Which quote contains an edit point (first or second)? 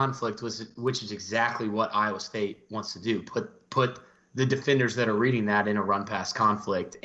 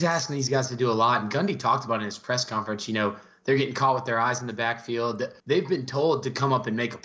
second